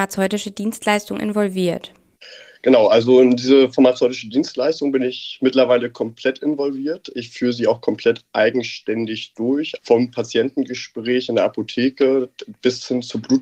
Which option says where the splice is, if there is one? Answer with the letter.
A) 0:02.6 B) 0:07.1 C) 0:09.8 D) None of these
C